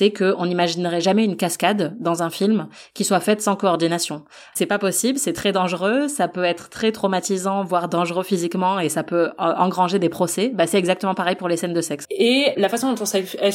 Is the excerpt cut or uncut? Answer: cut